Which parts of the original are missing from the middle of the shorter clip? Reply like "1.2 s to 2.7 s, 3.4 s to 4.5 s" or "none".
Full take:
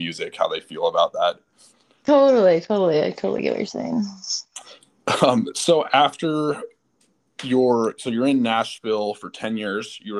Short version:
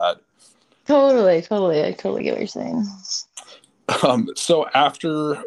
none